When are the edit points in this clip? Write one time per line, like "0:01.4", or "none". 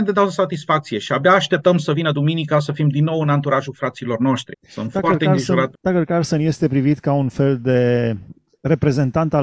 0:04.5
0:05.7
0:08.3